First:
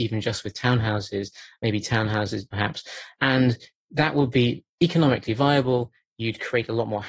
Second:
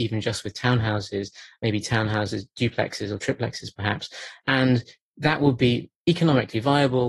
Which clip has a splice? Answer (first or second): first